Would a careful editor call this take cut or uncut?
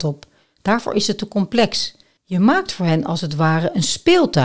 cut